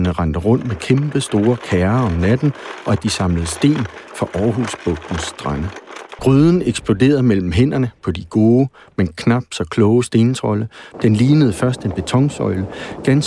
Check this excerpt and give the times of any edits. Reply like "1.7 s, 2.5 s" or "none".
6.2 s, 10.9 s